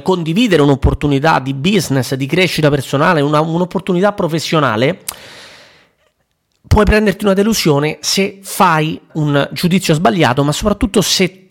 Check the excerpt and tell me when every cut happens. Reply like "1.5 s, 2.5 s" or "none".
9.1 s